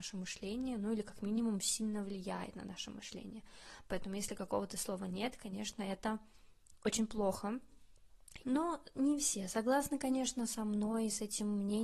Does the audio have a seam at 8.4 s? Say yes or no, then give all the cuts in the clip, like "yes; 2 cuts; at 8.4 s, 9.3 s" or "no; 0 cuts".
yes; 1 cut; at 8.4 s